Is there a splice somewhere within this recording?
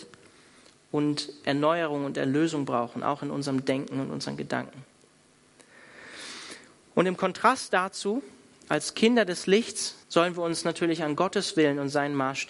yes; 1 cut; at 10.0 s

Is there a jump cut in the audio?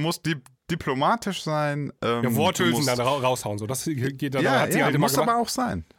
no; 0 cuts

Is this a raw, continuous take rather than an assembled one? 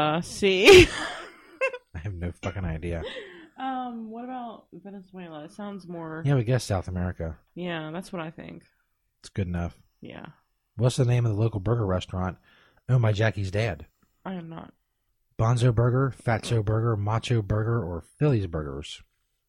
yes; 0 cuts

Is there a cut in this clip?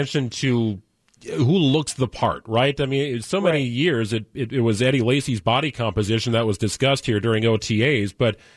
no; 0 cuts

